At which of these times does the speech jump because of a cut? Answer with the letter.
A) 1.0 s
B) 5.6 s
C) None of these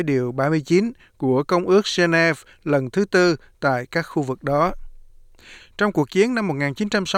B